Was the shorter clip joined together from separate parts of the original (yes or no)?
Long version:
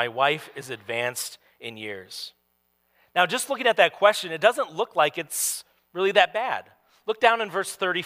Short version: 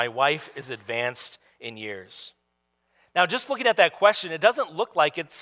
no